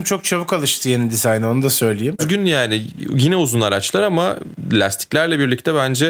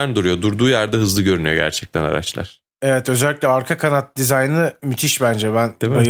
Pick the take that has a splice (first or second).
first